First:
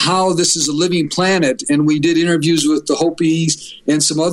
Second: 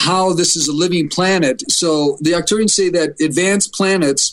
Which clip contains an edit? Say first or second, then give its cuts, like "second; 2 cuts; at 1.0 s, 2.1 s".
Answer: second; 1 cut; at 1.6 s